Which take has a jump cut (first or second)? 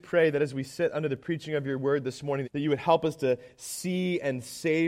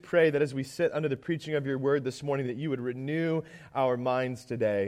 first